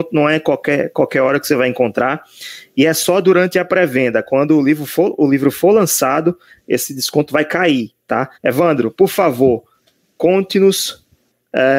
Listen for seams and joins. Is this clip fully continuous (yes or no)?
no